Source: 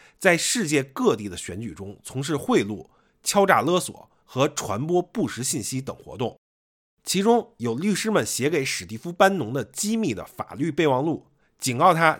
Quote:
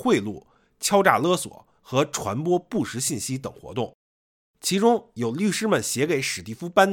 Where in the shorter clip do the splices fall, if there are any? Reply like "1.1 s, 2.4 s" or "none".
none